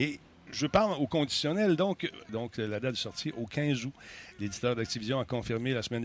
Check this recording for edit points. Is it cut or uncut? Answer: cut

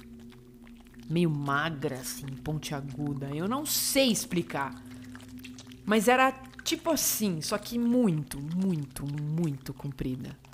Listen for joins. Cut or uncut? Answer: cut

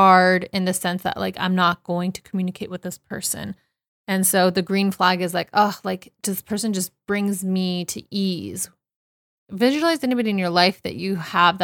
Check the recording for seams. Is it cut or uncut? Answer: uncut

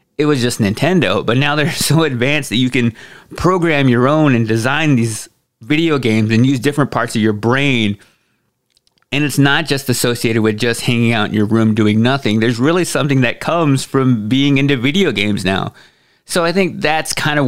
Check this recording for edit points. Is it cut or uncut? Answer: uncut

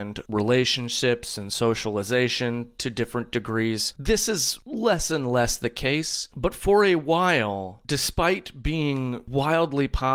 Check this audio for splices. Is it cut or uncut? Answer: uncut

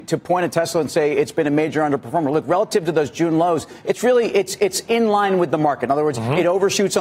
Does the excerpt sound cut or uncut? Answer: uncut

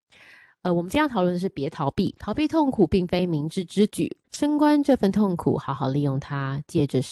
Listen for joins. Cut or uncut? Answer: cut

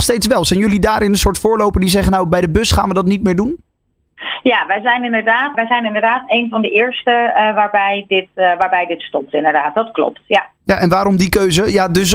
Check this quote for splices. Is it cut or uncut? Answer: cut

